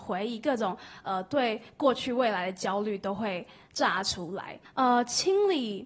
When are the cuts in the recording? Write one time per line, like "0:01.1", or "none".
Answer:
0:04.6